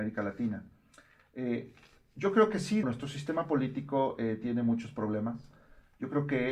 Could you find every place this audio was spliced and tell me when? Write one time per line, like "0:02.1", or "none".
0:02.8

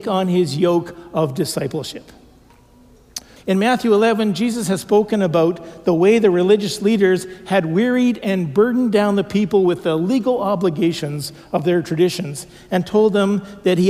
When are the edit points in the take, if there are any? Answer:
0:03.4

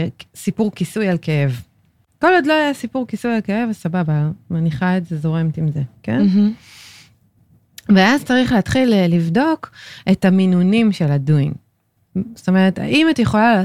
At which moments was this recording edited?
none

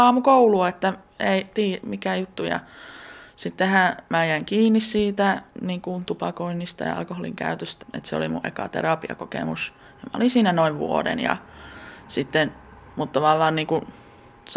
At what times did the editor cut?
0:07.8

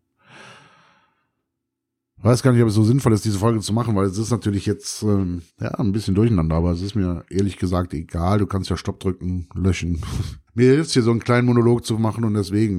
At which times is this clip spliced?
0:05.5
0:10.5

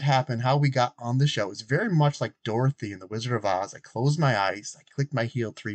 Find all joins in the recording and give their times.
none

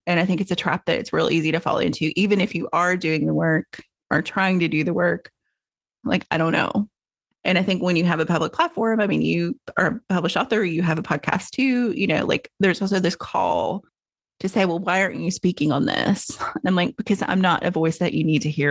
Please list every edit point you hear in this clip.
0:06.0

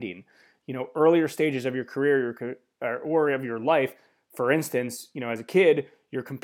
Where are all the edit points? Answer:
none

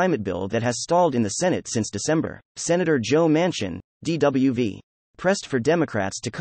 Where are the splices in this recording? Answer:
0:02.5

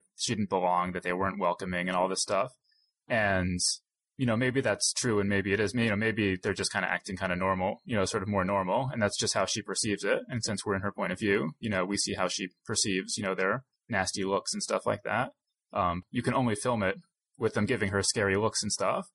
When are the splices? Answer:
0:16.0

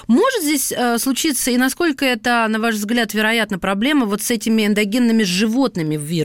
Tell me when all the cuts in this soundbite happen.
none

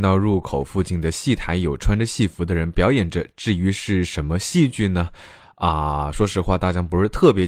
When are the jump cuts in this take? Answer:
none

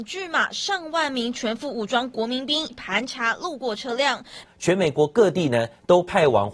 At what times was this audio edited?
0:02.7
0:04.4

